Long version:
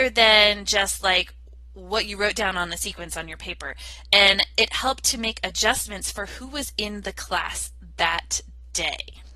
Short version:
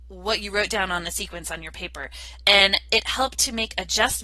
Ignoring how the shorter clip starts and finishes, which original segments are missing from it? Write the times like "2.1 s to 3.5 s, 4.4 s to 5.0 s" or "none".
none